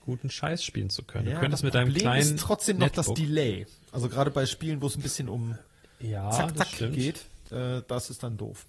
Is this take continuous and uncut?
yes; 0 cuts

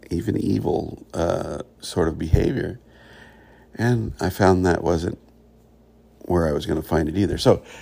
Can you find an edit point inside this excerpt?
no; 0 cuts

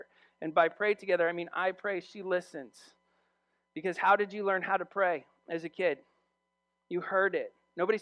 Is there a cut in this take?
no; 0 cuts

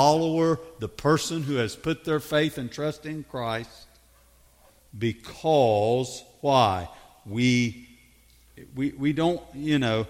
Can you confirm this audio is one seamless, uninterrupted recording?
yes; 0 cuts

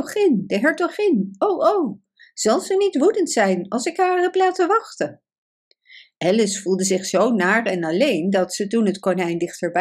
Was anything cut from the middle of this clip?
no; 0 cuts

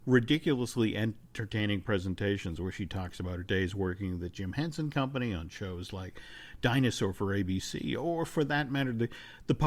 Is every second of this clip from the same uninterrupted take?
yes; 0 cuts

